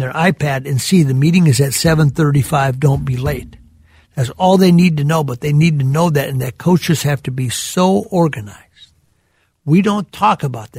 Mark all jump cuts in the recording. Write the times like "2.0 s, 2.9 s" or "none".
none